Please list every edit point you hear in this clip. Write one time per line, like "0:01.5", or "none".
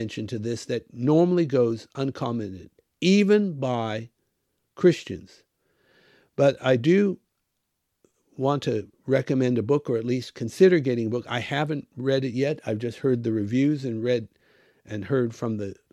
none